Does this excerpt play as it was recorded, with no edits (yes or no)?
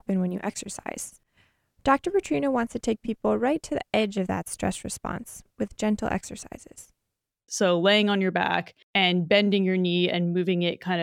no